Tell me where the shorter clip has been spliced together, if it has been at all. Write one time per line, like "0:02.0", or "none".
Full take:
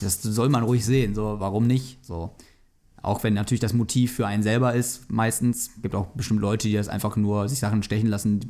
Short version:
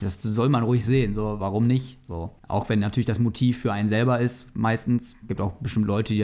0:02.4